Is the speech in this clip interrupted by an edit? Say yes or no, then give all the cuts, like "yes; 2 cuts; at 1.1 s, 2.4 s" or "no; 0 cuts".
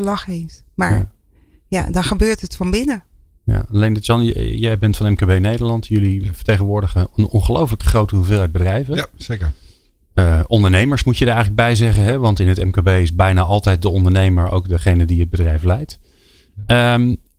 no; 0 cuts